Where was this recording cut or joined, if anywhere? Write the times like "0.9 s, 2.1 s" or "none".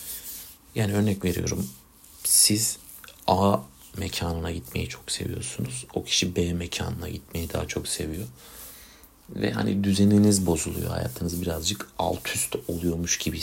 none